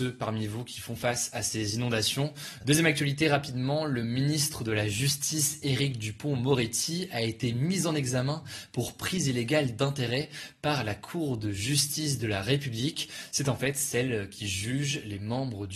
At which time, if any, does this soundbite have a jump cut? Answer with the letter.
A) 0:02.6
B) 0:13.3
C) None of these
A